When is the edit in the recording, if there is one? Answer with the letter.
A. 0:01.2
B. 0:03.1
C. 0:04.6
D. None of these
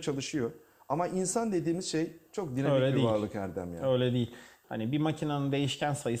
C